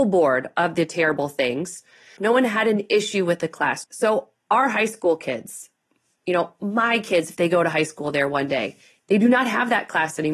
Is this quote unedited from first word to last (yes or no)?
no